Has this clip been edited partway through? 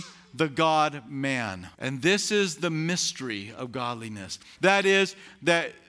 yes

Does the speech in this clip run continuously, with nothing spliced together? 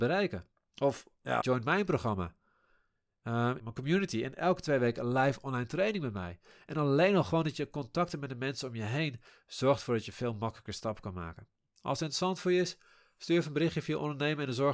no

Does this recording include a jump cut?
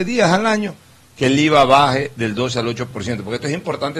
no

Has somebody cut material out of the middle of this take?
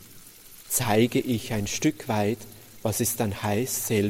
no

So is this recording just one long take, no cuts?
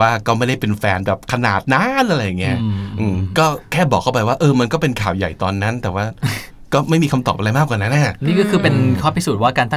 yes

